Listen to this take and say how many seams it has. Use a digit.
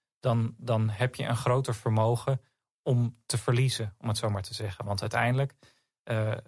0